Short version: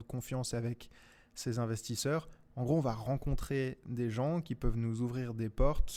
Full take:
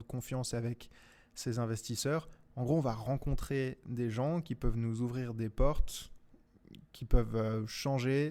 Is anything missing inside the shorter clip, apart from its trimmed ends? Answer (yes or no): no